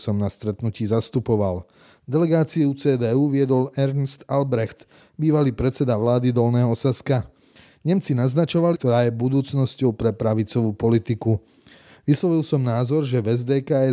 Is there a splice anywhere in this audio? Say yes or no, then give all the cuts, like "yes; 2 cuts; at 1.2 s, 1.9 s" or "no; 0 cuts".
yes; 1 cut; at 8.7 s